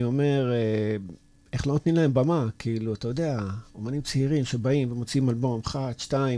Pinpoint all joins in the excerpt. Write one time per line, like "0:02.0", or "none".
none